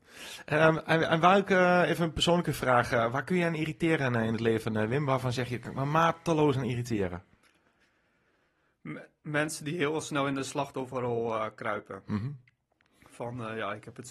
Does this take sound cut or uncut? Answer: uncut